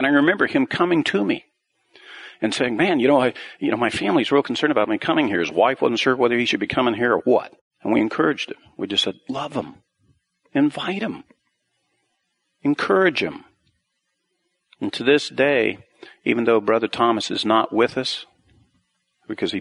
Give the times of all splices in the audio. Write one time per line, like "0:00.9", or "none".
none

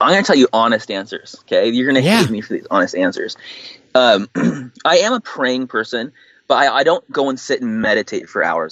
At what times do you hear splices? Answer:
none

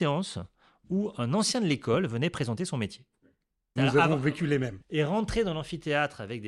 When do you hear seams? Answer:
0:03.8
0:04.8

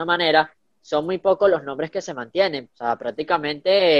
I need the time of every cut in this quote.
0:02.7

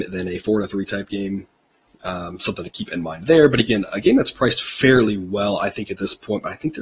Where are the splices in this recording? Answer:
none

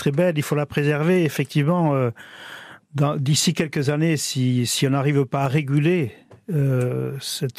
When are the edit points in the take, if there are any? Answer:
none

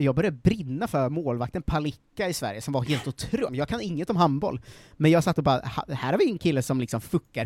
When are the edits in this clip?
0:03.5

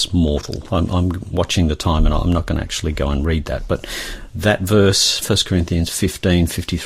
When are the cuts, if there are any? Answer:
0:05.2

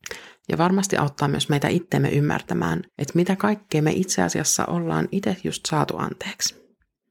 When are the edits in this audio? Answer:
0:02.9

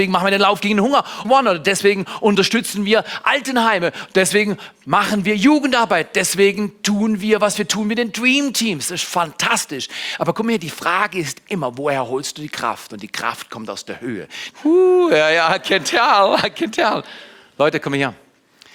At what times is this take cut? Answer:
0:01.2
0:14.5

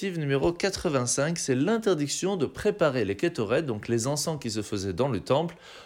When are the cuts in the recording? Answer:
none

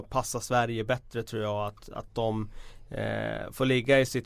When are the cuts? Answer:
none

